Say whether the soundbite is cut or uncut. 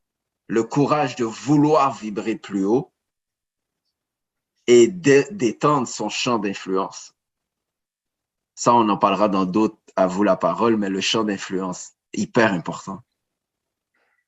uncut